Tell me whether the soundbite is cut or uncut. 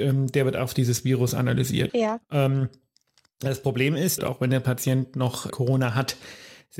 cut